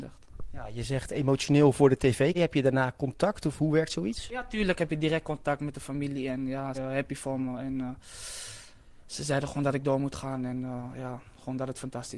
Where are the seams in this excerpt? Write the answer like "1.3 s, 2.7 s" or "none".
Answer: 2.3 s, 6.7 s